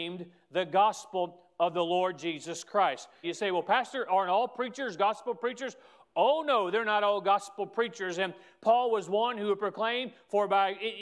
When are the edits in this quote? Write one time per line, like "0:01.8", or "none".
0:03.2